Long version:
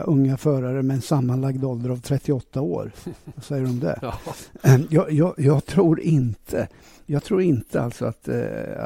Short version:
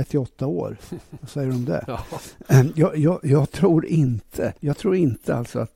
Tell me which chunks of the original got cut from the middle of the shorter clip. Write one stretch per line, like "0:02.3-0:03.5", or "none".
0:06.7-0:07.0